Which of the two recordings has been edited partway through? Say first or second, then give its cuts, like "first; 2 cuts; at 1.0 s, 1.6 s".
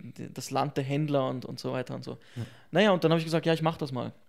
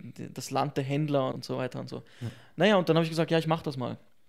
second; 1 cut; at 1.3 s